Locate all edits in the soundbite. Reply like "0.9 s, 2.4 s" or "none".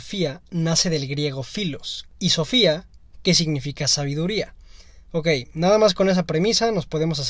2.1 s